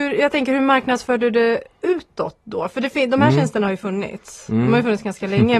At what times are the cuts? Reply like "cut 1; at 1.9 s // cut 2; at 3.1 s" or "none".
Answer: none